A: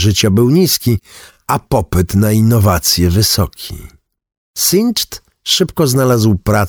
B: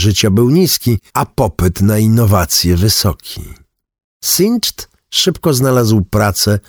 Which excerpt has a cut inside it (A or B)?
B